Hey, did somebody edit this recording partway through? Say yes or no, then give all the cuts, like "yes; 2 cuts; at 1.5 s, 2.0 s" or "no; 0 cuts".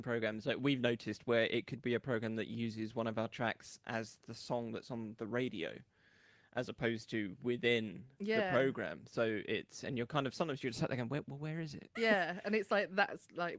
yes; 1 cut; at 12.0 s